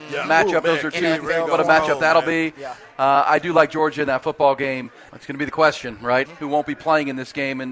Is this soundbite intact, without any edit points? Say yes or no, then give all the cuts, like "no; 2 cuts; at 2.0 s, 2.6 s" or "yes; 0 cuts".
no; 2 cuts; at 5.1 s, 6.2 s